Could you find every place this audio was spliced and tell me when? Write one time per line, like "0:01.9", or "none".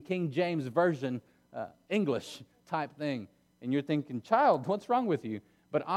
none